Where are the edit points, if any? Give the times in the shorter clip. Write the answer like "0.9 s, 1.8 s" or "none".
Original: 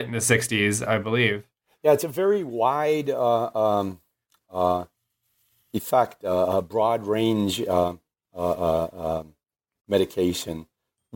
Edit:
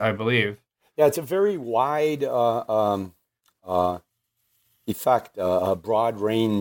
none